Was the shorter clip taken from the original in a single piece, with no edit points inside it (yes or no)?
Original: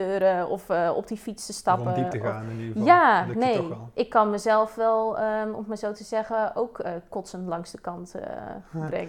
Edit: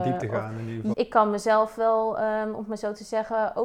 no